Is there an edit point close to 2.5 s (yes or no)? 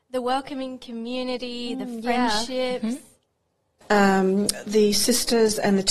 no